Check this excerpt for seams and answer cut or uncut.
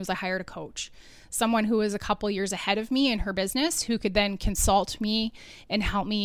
uncut